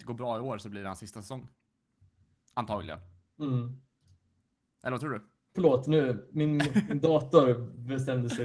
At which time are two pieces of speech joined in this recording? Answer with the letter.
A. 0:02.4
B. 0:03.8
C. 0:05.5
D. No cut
C